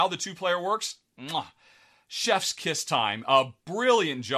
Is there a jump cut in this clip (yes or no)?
no